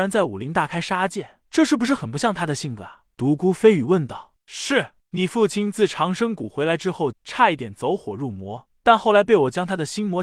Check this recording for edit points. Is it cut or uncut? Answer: cut